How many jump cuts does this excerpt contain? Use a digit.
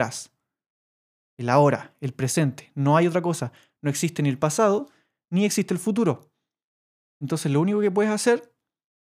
0